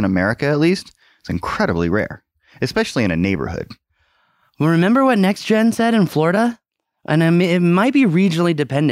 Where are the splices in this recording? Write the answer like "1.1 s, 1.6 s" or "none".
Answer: none